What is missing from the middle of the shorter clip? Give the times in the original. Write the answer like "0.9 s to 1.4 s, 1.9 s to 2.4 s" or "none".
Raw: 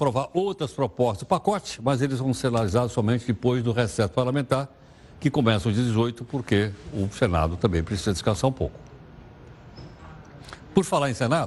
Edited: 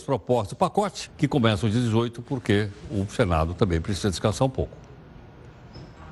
1.8 s to 5.1 s